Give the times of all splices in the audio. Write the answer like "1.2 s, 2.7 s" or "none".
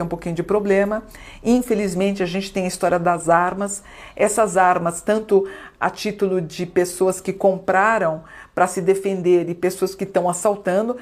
none